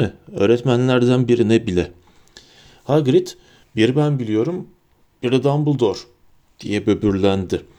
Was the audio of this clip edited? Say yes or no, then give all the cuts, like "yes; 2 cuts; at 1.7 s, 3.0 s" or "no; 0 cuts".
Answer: no; 0 cuts